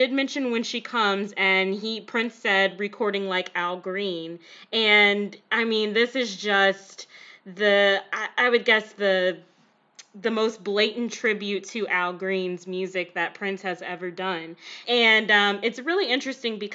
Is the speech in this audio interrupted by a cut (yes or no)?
yes